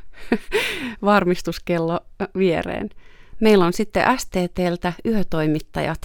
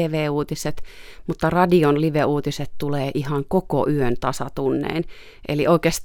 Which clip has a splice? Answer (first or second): first